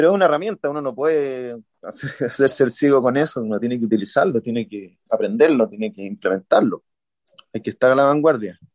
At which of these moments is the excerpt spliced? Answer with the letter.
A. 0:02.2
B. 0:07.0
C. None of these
C